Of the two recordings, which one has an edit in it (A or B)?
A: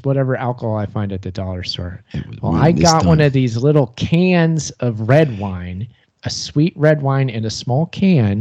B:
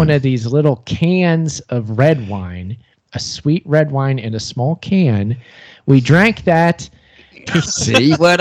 B